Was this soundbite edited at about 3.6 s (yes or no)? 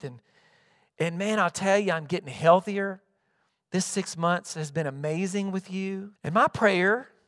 no